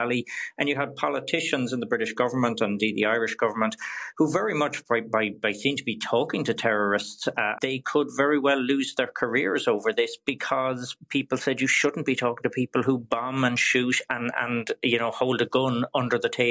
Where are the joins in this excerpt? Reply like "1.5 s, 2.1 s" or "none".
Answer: 7.6 s